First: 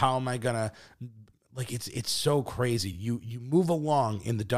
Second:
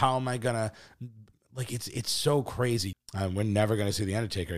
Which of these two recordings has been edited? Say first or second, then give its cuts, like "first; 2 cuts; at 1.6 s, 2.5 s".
second; 1 cut; at 2.9 s